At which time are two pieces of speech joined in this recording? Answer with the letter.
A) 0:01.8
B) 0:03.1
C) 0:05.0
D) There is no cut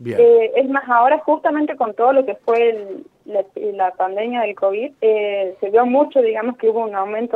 C